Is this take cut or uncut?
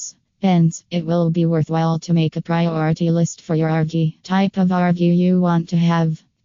cut